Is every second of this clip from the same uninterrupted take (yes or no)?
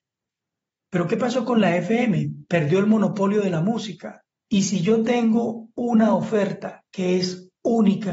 no